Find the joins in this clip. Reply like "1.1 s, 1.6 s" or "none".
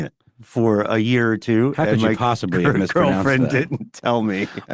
none